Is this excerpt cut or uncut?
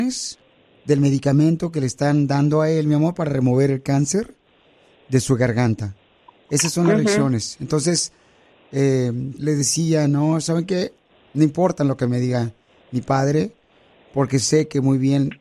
cut